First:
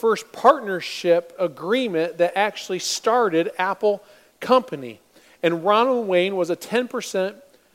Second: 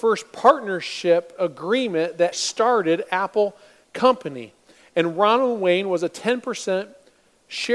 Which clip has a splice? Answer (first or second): second